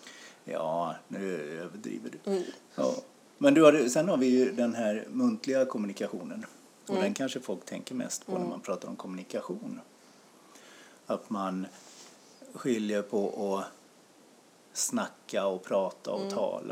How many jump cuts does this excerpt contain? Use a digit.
0